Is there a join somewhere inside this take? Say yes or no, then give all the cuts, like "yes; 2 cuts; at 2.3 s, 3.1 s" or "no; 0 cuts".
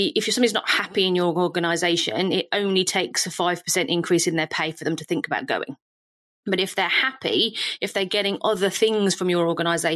no; 0 cuts